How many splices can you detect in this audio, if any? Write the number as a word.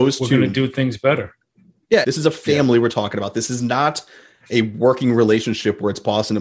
one